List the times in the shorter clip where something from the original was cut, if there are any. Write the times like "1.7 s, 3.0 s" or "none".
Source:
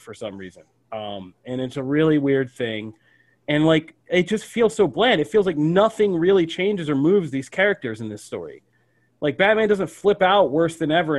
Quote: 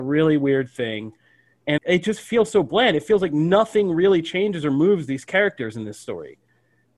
1.8 s